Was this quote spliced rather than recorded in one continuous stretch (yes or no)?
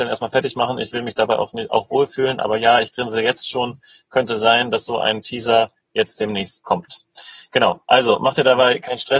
no